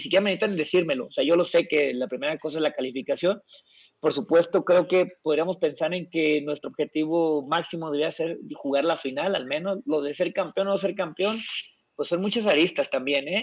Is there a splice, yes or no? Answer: no